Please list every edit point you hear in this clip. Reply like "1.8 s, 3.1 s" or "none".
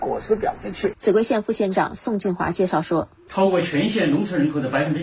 0.9 s, 3.3 s